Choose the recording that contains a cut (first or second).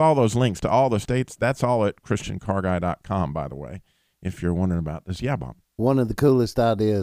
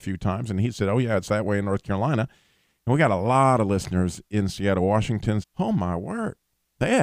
second